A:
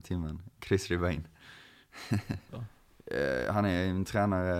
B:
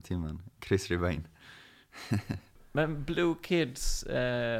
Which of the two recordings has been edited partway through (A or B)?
A